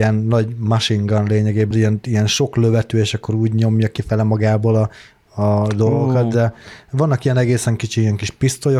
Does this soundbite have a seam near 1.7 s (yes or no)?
yes